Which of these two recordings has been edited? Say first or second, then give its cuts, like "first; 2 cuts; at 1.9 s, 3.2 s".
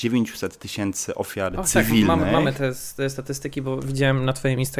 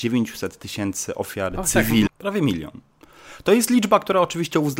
second; 1 cut; at 2.1 s